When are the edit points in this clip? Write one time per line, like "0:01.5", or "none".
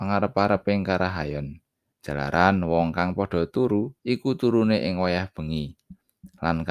0:01.9
0:04.0